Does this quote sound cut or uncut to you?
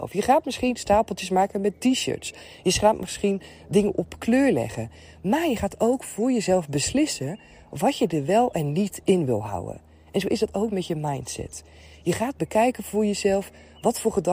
uncut